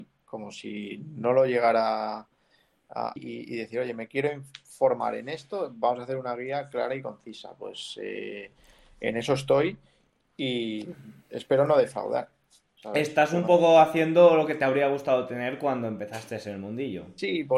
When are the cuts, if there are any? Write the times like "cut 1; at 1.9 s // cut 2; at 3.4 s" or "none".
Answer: cut 1; at 3.2 s